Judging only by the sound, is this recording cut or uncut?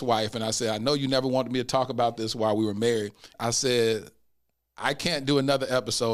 cut